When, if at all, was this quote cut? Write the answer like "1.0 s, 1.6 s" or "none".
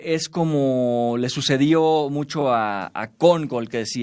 none